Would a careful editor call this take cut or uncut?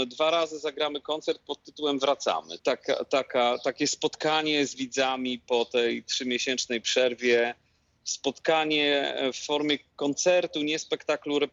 cut